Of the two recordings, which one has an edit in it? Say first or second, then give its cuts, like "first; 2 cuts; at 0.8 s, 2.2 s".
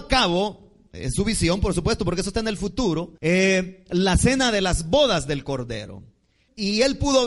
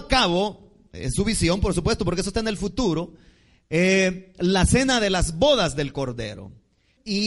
first; 1 cut; at 3.2 s